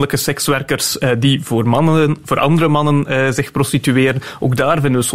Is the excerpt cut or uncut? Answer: uncut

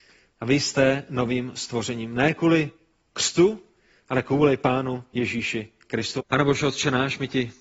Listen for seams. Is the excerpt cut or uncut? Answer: cut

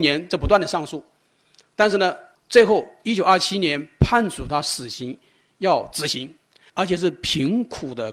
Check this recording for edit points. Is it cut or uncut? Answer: cut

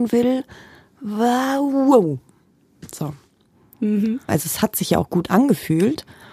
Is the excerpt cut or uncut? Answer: cut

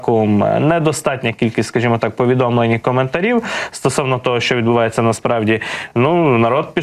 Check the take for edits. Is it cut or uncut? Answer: uncut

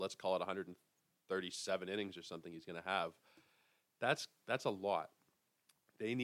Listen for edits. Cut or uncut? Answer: uncut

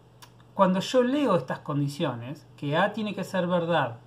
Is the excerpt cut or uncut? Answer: uncut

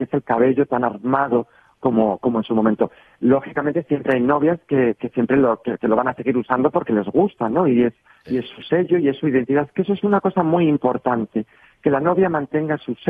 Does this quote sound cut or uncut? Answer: uncut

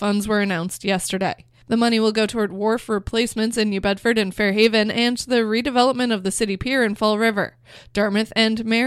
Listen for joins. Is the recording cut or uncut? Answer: uncut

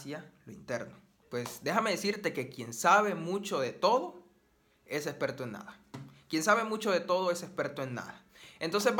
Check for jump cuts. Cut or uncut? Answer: cut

